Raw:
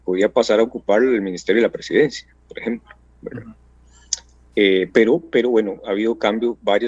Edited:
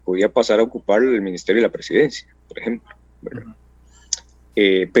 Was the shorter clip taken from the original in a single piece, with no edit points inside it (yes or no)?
yes